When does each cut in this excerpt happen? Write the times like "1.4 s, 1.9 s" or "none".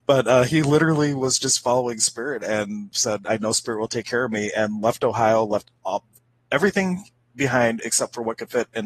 2.9 s